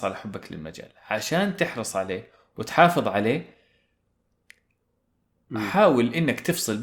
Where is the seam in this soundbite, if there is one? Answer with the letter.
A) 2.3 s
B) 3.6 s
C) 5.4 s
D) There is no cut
D